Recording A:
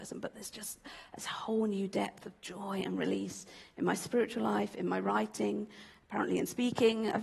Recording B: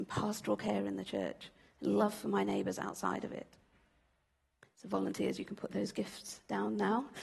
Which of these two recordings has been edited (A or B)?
B